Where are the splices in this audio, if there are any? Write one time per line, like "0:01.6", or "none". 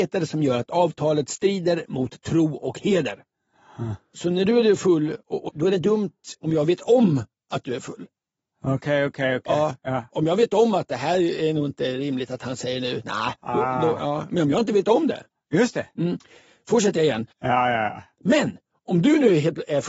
0:05.5
0:17.3